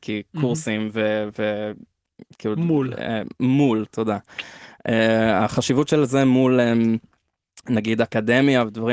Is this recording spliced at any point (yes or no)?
no